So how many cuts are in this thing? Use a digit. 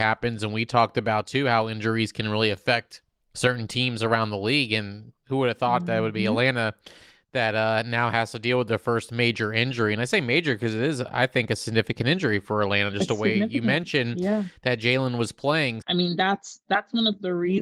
1